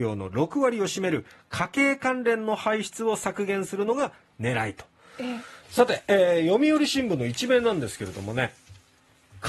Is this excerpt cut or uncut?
cut